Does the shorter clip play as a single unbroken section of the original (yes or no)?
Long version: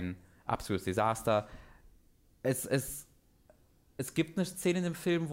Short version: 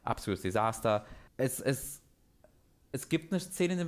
no